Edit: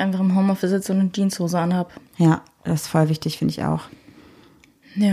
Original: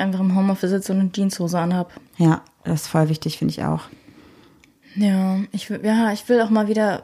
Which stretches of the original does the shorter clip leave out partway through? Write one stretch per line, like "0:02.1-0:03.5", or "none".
none

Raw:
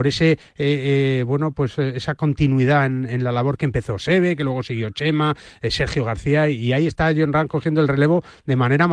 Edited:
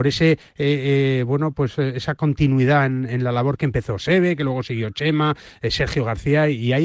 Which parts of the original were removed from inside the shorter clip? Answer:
none

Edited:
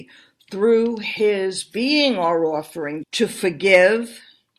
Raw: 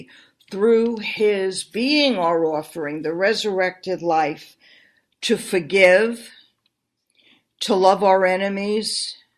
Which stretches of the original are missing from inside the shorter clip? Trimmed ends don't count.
0:03.0-0:05.1

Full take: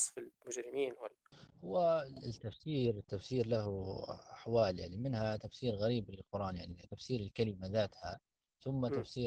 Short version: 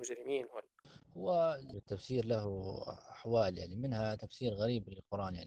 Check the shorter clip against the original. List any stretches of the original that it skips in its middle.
0:02.2-0:02.9

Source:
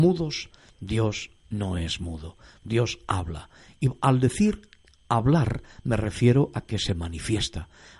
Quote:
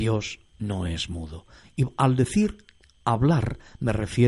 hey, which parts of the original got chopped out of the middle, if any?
0:02.5-0:03.7

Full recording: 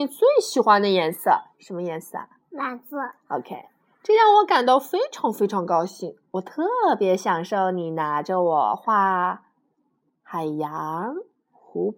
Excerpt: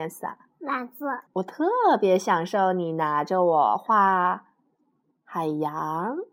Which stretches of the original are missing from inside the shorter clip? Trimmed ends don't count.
0:03.2-0:06.2

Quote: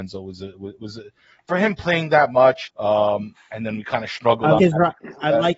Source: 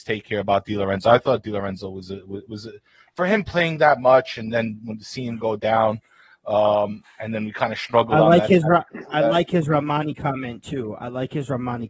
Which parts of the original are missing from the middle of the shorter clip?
0:04.3-0:06.3
0:08.3-0:08.5

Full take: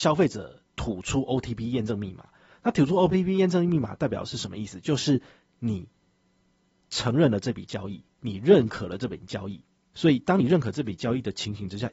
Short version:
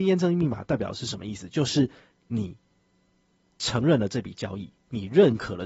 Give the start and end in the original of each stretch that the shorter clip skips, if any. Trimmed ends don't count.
none

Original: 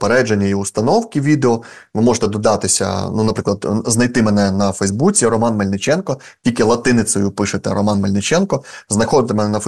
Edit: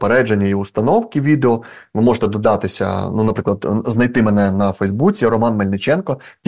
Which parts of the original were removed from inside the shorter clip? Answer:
none

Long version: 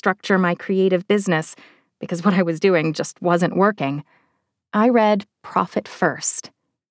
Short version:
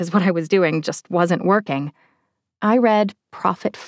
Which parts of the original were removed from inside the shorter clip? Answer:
none

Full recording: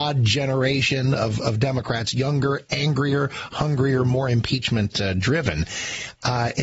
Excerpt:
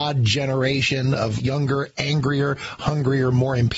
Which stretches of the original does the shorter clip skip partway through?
0:01.4-0:02.1

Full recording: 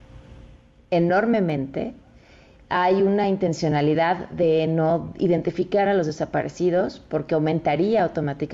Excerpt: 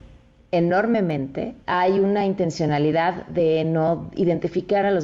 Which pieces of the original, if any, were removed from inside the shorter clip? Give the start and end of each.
0:02.0-0:02.6

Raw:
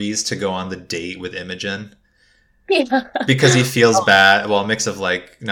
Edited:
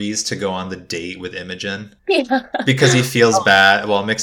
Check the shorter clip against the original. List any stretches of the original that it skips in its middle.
0:02.0-0:02.6

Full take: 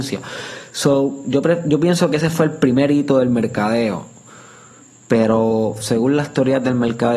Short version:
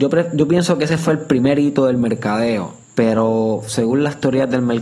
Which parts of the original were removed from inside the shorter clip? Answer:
0:04.2-0:05.0

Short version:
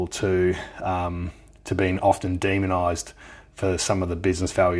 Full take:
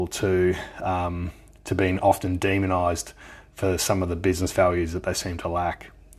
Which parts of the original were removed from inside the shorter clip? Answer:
none

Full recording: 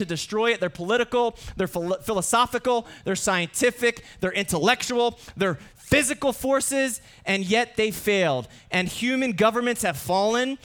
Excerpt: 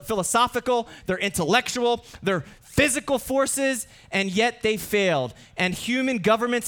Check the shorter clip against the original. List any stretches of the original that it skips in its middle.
0:03.0-0:04.1

